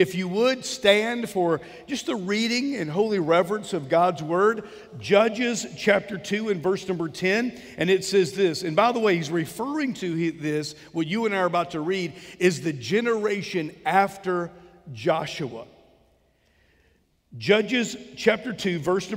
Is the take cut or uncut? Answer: uncut